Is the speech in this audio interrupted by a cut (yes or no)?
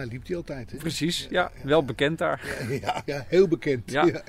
yes